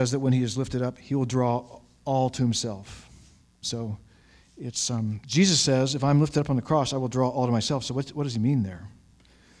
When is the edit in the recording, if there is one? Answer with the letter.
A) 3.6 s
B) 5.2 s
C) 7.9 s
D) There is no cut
A